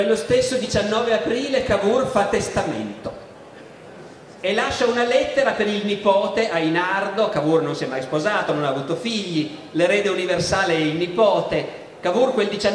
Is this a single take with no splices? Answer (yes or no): yes